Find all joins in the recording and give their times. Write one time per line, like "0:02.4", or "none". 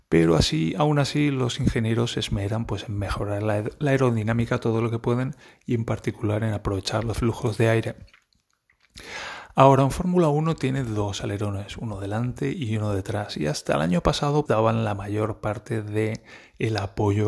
0:14.5